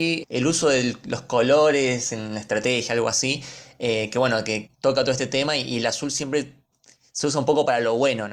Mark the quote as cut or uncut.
uncut